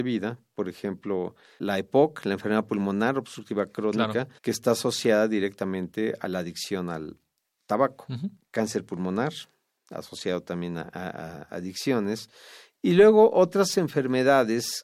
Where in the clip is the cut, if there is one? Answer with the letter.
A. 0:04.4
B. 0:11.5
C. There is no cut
A